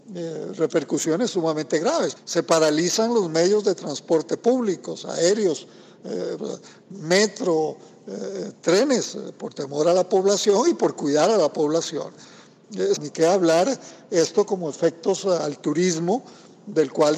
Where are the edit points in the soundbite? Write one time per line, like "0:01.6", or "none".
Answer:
0:02.2
0:06.4
0:13.0